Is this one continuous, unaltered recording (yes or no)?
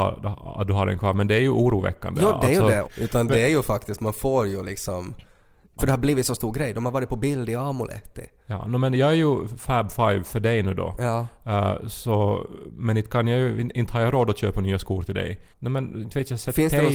no